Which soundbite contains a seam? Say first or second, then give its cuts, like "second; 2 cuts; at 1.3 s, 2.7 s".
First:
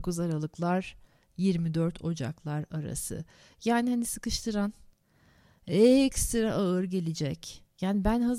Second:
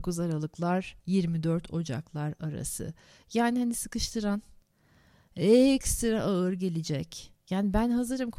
second; 1 cut; at 1.0 s